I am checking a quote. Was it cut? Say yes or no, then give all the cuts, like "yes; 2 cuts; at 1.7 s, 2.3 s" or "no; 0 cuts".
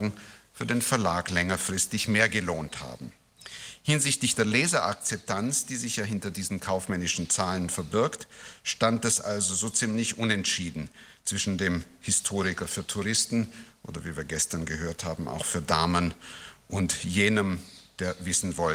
no; 0 cuts